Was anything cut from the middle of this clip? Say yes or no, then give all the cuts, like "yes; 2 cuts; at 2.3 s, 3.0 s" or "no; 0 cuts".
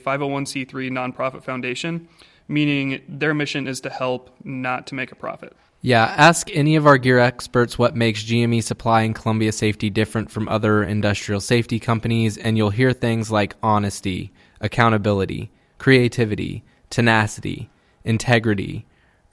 yes; 1 cut; at 15.7 s